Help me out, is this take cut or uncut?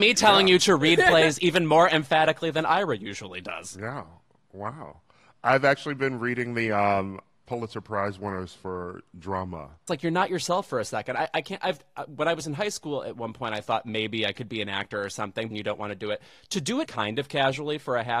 cut